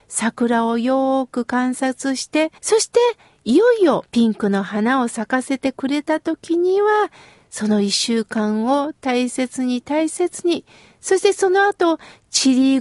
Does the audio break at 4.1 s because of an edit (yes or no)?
yes